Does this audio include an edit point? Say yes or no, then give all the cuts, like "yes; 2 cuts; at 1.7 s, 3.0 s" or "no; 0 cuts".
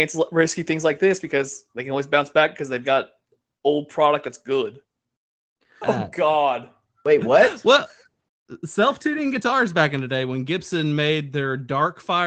yes; 1 cut; at 5.8 s